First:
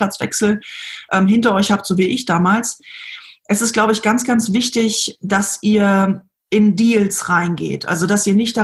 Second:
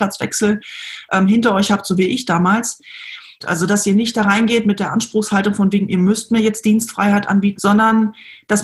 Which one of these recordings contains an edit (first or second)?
second